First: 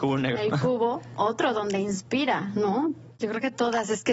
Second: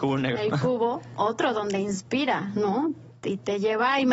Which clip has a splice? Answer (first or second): first